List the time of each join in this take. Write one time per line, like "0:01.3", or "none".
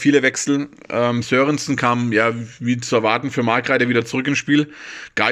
none

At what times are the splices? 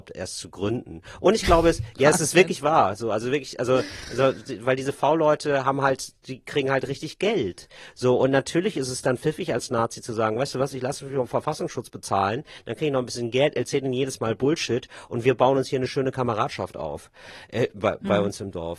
none

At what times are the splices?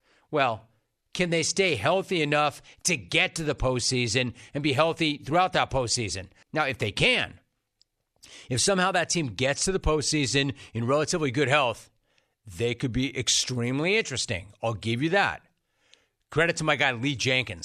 0:06.4

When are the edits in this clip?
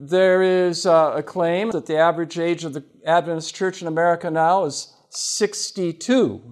0:01.7

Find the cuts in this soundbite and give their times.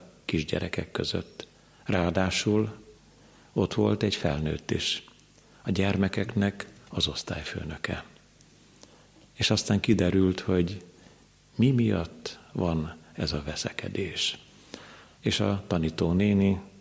0:15.2

